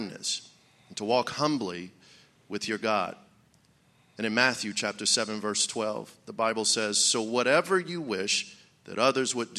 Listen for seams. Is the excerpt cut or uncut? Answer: uncut